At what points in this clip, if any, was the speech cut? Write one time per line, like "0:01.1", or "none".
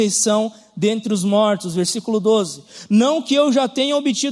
none